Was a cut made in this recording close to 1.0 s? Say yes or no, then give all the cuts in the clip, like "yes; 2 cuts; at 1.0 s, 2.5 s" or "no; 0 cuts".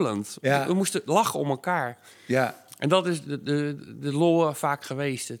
no; 1 cut; at 3.2 s